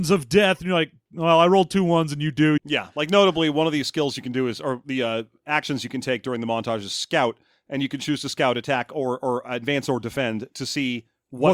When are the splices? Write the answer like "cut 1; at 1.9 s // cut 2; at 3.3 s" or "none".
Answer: cut 1; at 2.6 s